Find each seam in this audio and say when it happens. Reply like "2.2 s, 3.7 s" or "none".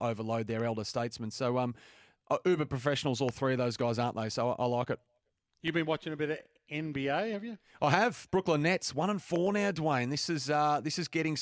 none